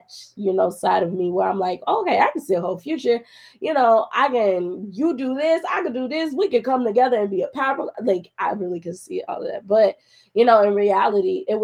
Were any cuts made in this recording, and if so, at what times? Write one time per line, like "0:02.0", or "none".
none